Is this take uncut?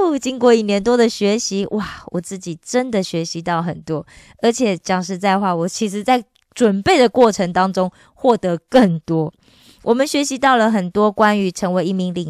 yes; 0 cuts

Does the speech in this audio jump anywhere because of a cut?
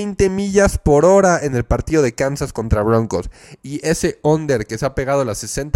no; 0 cuts

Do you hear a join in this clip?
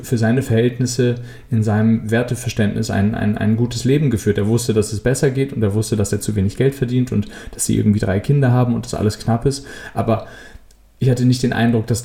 no; 0 cuts

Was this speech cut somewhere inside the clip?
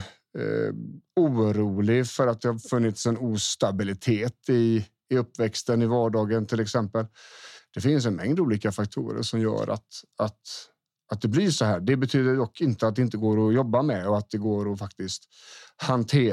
yes; 1 cut; at 7.6 s

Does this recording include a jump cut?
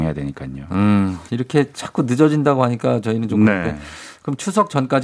yes; 1 cut; at 1.3 s

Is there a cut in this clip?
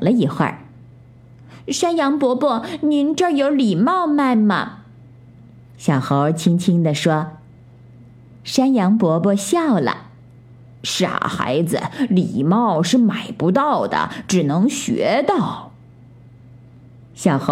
no; 0 cuts

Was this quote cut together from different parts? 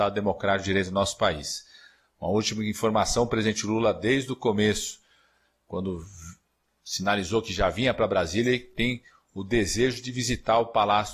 no; 0 cuts

